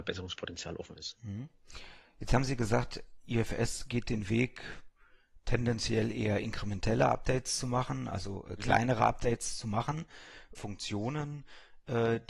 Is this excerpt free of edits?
no; 1 cut; at 10.5 s

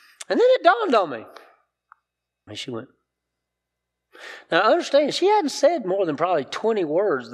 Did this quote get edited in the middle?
yes; 1 cut; at 2.5 s

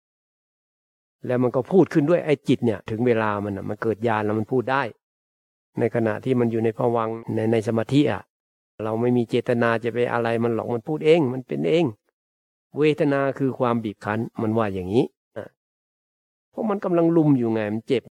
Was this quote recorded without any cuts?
no; 1 cut; at 15.4 s

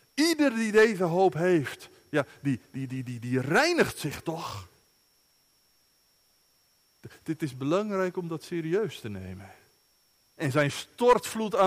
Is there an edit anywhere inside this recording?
yes; 1 cut; at 10.4 s

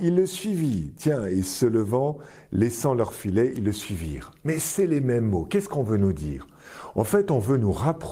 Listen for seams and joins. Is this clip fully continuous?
yes; 0 cuts

